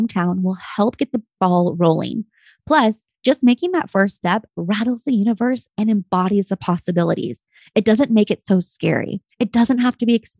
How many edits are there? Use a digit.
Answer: 1